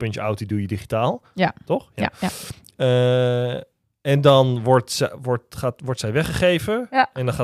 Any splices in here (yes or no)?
no